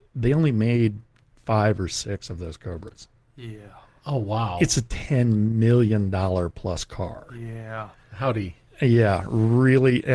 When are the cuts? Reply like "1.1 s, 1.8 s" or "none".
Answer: none